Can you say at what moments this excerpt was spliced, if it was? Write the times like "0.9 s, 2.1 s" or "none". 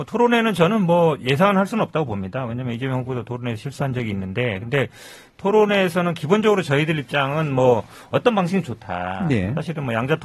none